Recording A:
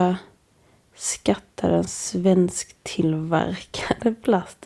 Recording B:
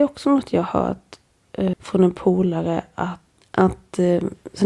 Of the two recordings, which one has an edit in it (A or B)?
B